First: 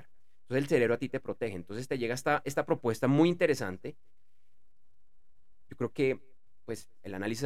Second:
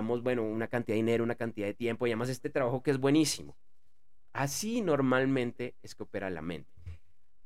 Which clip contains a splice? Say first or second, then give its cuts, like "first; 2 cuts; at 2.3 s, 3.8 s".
first; 1 cut; at 5.7 s